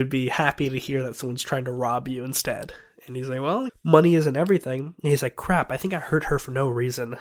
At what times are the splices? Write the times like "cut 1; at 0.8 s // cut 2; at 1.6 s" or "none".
cut 1; at 3.7 s